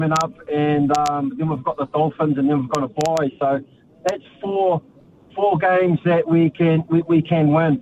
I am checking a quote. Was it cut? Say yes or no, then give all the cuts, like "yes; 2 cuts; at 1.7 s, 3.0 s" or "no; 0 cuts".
no; 0 cuts